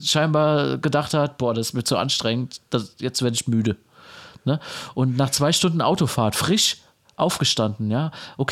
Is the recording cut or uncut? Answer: uncut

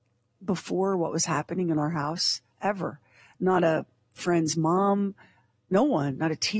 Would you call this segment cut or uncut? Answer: uncut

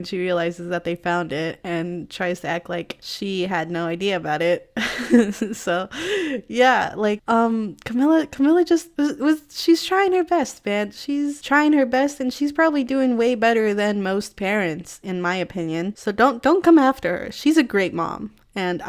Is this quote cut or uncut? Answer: uncut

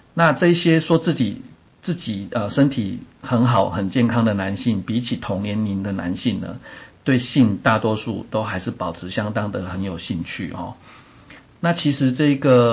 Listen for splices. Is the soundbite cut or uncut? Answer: uncut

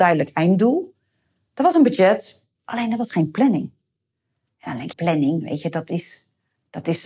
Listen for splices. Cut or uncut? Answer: cut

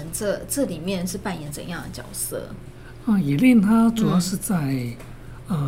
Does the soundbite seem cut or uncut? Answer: uncut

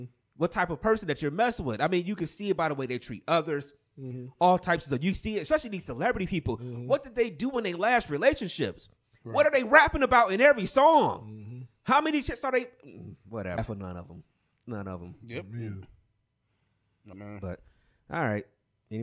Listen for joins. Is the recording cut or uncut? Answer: cut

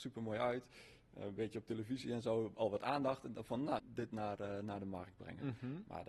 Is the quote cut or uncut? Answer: cut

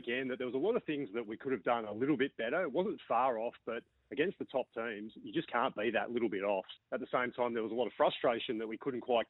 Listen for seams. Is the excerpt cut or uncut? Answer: cut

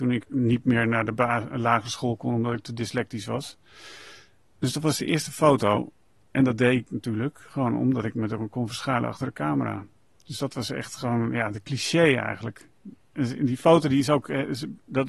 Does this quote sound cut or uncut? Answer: uncut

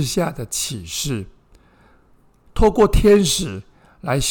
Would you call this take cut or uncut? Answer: uncut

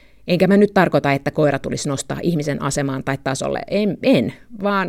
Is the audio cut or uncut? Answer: uncut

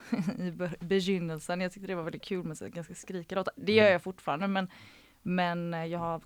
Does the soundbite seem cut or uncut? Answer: uncut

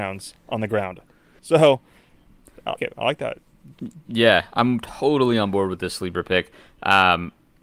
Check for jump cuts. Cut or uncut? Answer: cut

